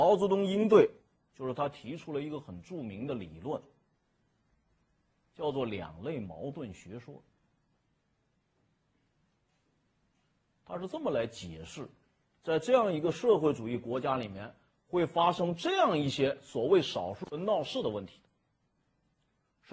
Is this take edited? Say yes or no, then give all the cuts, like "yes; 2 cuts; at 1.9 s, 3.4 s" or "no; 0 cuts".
no; 0 cuts